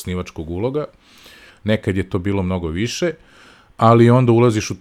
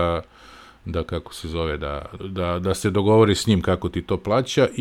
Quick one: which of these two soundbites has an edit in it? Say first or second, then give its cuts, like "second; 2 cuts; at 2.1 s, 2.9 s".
second; 1 cut; at 2.2 s